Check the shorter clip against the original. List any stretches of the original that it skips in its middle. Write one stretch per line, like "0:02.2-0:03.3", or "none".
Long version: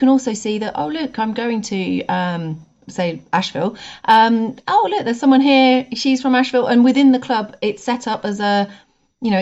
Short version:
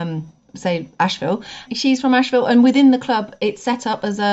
0:04.0-0:05.9